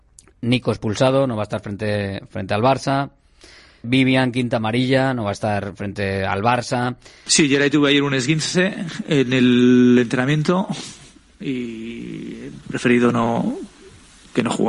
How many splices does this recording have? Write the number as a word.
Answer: two